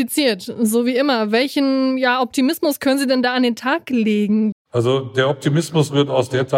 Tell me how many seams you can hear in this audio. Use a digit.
1